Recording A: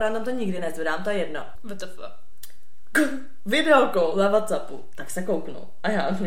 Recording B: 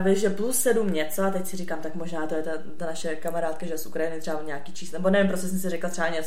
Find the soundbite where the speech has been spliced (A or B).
A